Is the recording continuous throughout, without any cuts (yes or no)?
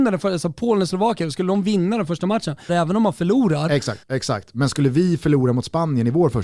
no